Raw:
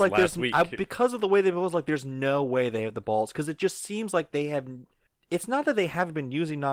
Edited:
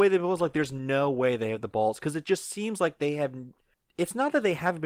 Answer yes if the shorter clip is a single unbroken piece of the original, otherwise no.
yes